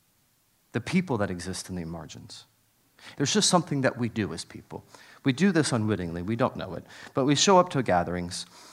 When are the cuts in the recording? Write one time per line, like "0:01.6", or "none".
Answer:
0:03.1

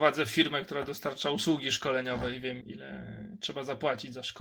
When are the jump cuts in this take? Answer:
0:02.6

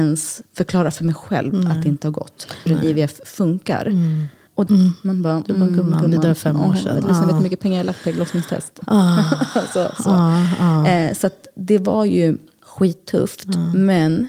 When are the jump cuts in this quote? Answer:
0:02.7
0:04.7

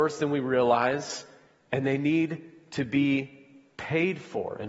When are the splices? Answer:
none

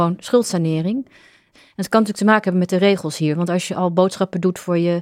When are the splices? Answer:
0:01.5

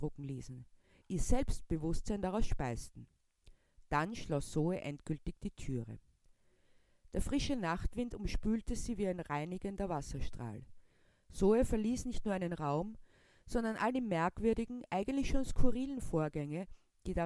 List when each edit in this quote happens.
0:01.0

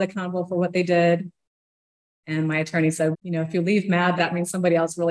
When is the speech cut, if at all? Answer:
0:03.1
0:04.2

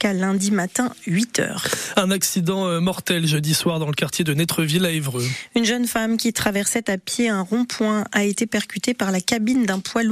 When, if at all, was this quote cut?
none

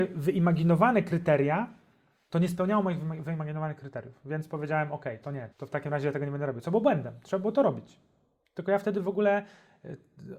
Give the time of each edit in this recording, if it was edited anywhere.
0:05.5

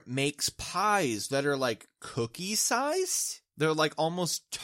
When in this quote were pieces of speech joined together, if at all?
none

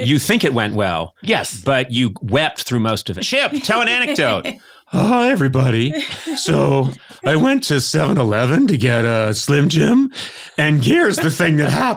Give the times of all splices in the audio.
0:03.2

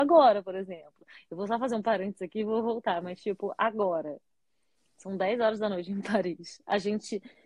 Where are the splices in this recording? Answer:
none

